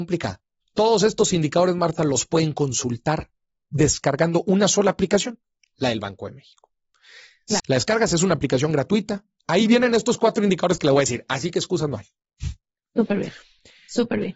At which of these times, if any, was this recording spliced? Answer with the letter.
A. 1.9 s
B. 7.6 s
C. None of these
B